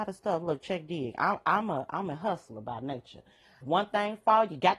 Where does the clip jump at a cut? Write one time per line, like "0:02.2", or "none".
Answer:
0:03.6

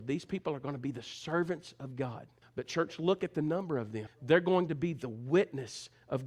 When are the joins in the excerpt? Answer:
0:02.4
0:04.1

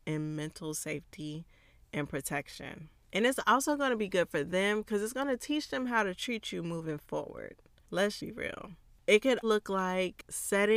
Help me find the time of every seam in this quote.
0:08.2
0:09.4

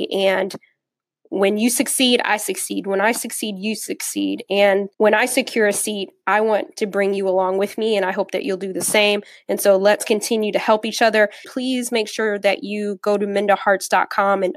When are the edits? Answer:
0:04.9
0:11.4

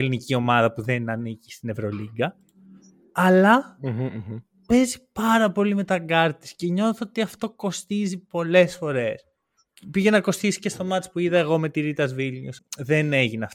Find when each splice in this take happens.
0:12.6

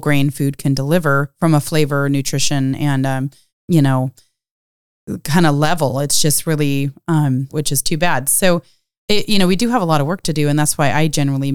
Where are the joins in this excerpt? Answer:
0:03.5
0:07.5

